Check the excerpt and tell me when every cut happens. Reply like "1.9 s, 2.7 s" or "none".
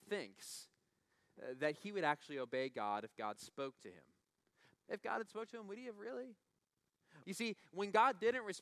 4.8 s, 7.2 s